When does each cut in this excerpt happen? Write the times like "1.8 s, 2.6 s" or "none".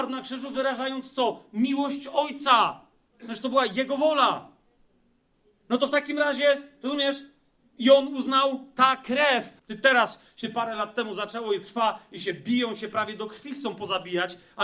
9.6 s